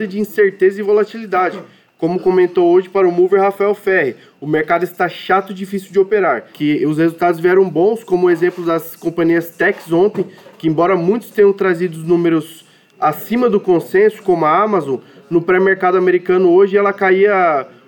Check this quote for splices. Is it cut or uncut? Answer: cut